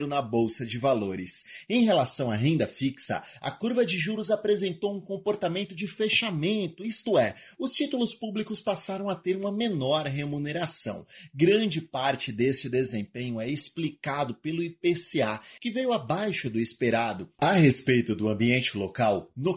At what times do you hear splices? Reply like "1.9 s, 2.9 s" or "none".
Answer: 15.6 s, 17.4 s